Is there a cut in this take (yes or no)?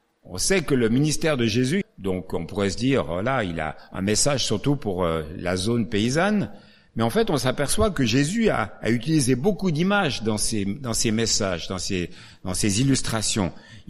yes